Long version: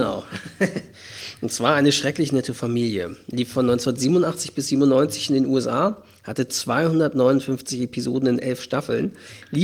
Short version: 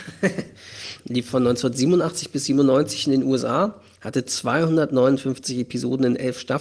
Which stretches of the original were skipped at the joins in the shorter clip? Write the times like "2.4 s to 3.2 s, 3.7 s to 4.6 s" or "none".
1.4 s to 3.2 s